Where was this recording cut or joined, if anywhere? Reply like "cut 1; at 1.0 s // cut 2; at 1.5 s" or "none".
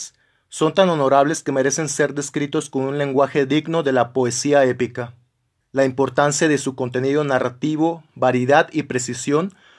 cut 1; at 5.6 s